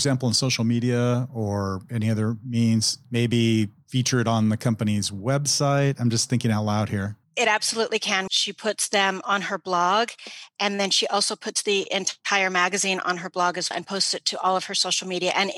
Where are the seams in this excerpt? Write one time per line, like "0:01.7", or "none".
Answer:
0:08.3
0:13.7